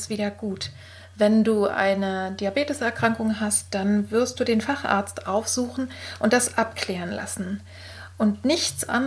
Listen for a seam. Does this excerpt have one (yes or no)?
no